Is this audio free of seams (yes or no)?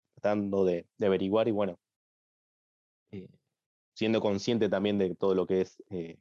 yes